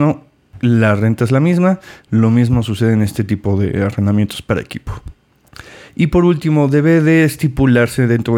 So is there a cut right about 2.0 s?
no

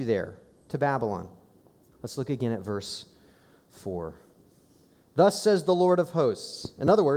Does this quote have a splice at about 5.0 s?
no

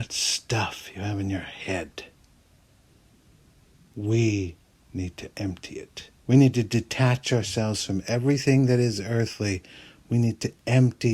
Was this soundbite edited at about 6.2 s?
yes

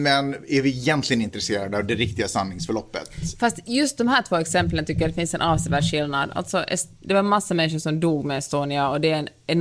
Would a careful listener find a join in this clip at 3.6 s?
no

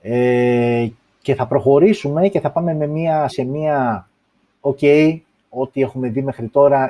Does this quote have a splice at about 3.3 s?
yes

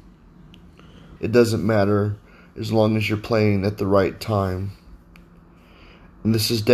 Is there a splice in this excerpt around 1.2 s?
yes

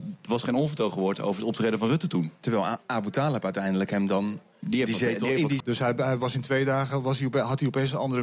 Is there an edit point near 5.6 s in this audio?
yes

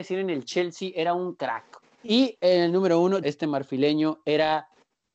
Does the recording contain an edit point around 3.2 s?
yes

